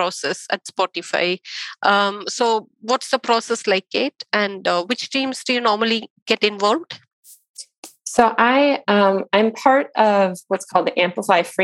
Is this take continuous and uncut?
yes; 0 cuts

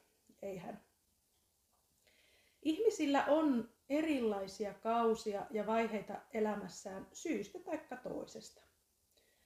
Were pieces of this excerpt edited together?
no; 0 cuts

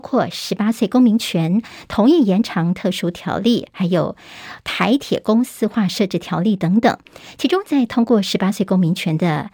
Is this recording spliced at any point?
no; 0 cuts

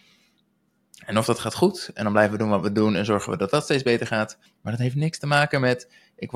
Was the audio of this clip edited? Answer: yes; 1 cut; at 4.5 s

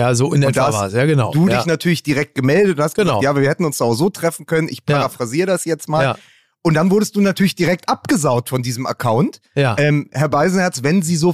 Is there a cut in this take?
no; 0 cuts

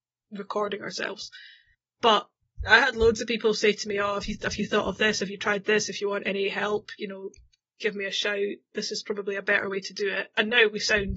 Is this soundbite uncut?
yes; 0 cuts

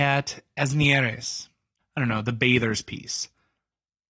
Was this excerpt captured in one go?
no; 1 cut; at 1.8 s

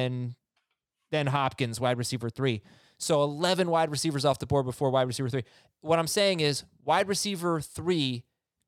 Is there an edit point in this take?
no; 0 cuts

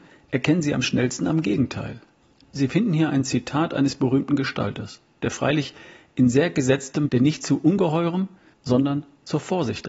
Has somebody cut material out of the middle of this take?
yes; 2 cuts; at 7.1 s, 8.5 s

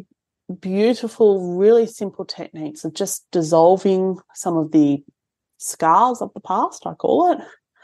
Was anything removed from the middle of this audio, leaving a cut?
no; 0 cuts

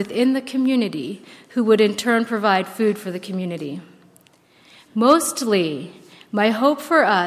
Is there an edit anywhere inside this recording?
yes; 1 cut; at 4.8 s

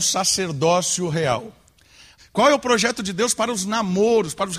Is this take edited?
yes; 1 cut; at 2.2 s

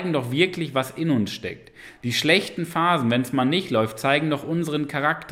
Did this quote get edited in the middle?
no; 0 cuts

